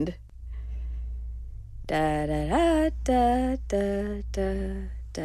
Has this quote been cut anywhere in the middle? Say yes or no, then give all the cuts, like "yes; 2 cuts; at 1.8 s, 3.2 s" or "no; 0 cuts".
no; 0 cuts